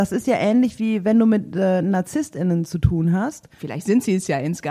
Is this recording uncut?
no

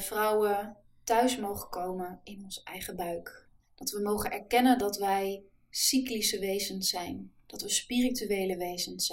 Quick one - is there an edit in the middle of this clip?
no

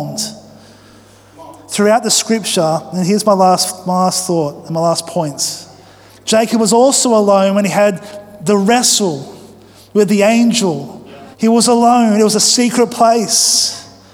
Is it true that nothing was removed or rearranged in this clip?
no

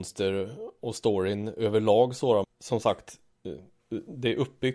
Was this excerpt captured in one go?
no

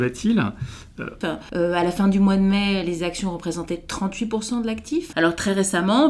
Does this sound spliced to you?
yes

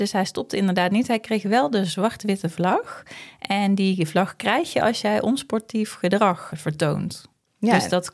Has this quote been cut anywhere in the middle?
yes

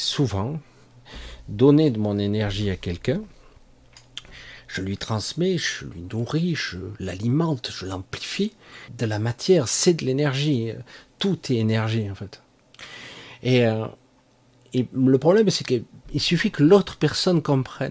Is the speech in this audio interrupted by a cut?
yes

